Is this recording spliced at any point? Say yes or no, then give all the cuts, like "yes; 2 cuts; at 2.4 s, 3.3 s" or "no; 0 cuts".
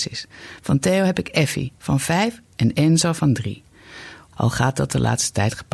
yes; 1 cut; at 4.3 s